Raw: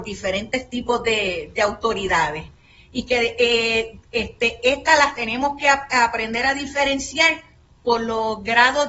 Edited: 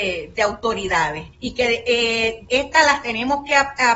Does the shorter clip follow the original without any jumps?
no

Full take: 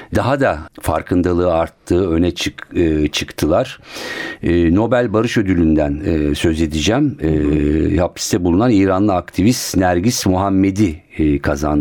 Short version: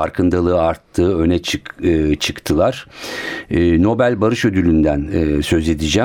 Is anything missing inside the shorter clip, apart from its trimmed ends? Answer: no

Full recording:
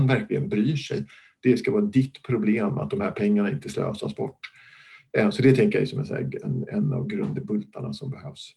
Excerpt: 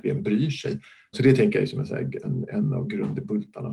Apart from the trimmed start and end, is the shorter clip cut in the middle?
yes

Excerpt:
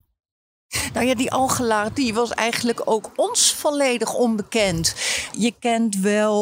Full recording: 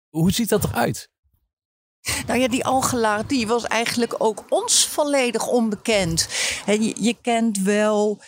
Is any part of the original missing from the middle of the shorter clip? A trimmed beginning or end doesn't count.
yes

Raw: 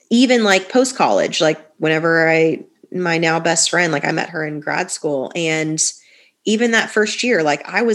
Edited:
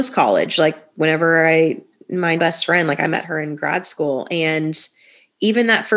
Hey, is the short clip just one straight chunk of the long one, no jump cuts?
no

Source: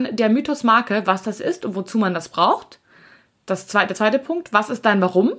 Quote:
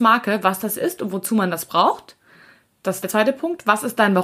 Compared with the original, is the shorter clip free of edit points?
no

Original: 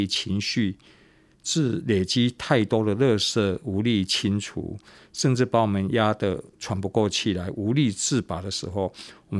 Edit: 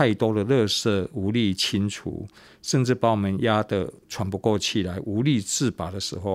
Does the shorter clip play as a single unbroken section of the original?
yes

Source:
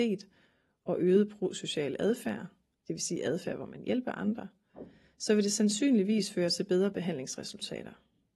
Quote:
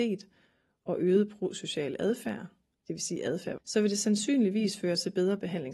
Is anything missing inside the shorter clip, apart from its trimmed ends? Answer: yes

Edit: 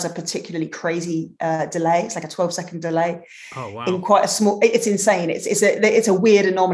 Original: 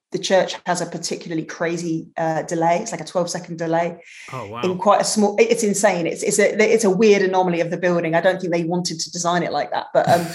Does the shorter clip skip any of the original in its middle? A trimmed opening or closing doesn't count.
no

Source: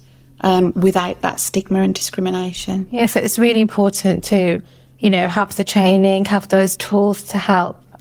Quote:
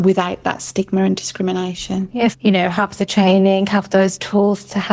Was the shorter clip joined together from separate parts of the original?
yes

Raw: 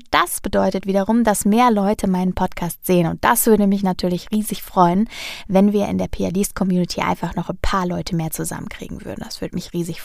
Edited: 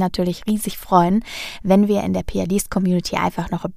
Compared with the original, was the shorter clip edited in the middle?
no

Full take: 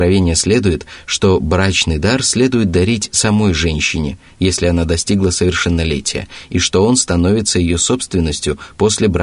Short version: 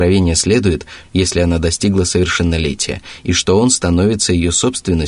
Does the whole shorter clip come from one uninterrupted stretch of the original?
no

